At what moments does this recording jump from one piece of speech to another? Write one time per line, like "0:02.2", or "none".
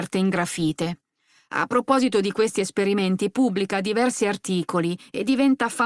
none